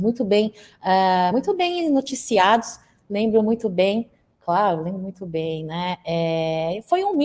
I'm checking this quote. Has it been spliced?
no; 0 cuts

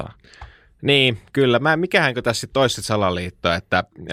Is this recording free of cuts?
yes; 0 cuts

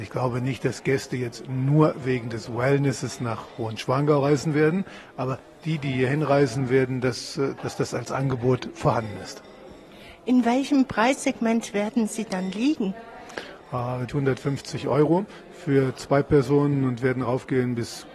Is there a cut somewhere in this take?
yes; 2 cuts; at 7.6 s, 14.1 s

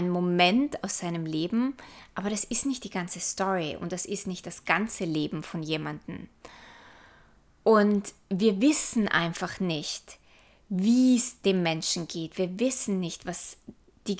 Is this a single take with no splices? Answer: yes; 0 cuts

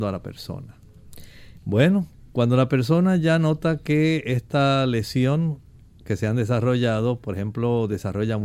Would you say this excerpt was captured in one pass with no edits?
no; 1 cut; at 1.6 s

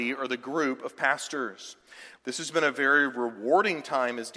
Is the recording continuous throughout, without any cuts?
no; 1 cut; at 2.2 s

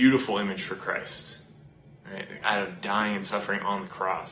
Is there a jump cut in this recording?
yes; 1 cut; at 2.4 s

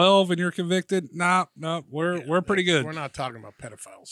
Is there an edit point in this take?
no; 0 cuts

